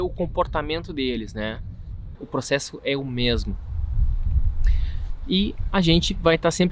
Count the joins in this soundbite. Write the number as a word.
one